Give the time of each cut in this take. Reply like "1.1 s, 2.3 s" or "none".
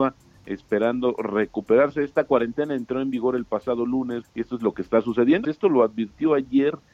4.2 s, 5.4 s

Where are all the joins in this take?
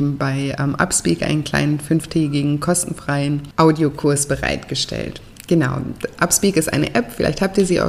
none

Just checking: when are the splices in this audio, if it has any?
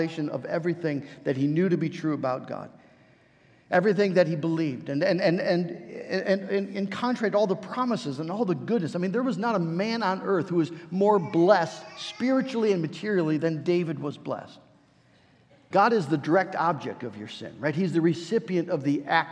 15.7 s

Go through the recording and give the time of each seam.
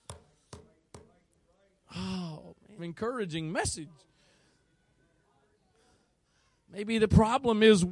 2.8 s

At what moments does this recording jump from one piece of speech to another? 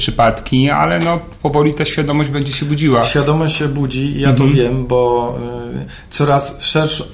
none

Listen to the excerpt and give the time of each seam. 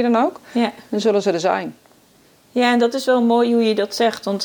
none

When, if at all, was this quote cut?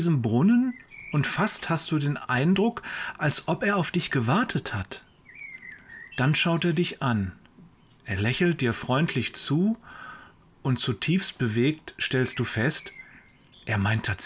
none

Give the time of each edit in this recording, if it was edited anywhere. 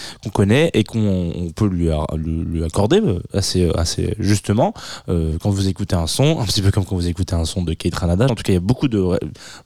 8.3 s

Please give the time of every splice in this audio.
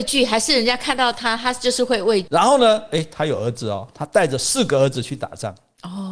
2.3 s

